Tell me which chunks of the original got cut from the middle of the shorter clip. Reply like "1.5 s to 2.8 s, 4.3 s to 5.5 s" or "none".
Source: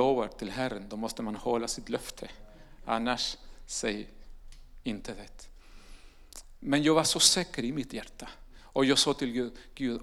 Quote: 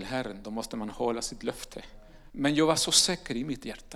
2.8 s to 6.6 s